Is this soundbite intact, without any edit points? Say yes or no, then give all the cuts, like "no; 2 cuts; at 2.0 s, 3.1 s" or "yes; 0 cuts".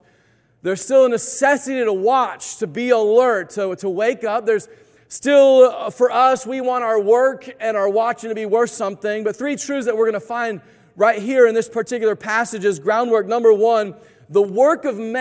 yes; 0 cuts